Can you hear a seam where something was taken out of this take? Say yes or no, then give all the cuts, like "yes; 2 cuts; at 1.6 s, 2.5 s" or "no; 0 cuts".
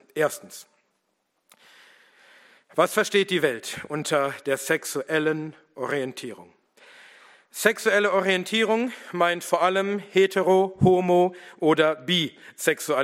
no; 0 cuts